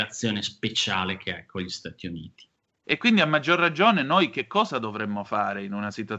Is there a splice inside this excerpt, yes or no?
yes